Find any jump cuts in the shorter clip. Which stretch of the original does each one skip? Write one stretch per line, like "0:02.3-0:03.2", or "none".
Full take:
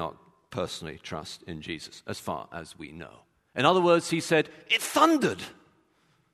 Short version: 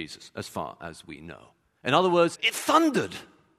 0:04.0-0:04.6

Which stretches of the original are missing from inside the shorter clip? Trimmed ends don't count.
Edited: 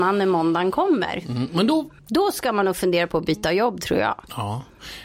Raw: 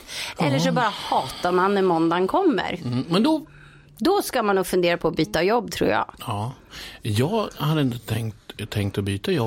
0:03.5-0:03.9

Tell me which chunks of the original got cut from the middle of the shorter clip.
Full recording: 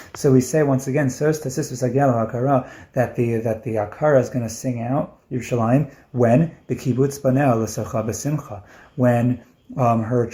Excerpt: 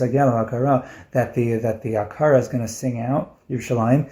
none

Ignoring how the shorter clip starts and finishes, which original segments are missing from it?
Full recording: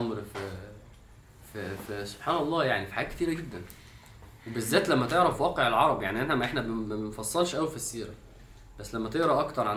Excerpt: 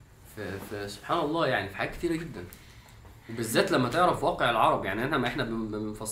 none

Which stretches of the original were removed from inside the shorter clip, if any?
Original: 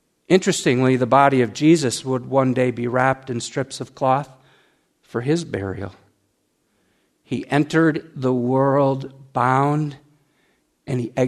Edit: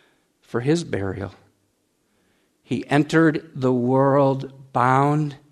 none

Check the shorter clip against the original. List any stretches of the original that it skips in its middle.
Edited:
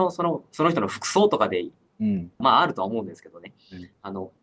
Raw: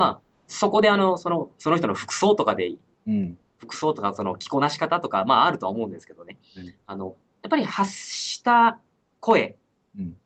0:03.5-0:05.2

